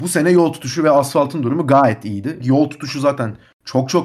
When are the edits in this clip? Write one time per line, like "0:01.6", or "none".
0:02.4